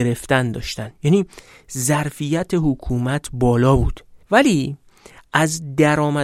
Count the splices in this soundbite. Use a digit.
1